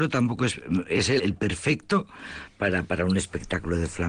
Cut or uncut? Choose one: cut